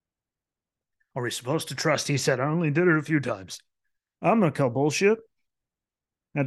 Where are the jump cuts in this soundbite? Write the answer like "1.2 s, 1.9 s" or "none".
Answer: none